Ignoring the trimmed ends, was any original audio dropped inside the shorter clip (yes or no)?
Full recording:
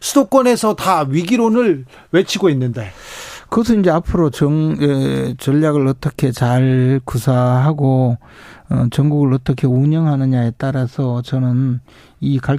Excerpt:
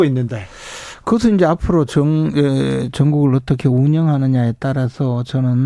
yes